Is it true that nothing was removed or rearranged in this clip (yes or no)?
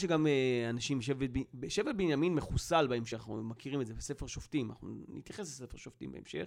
yes